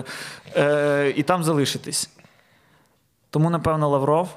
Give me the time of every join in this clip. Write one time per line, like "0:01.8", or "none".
none